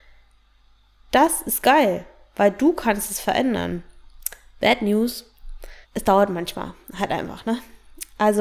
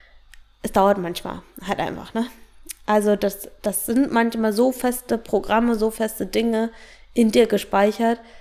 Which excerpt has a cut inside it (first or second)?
first